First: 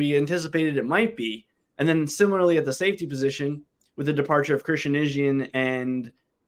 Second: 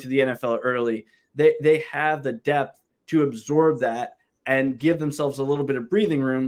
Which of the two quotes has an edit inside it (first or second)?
first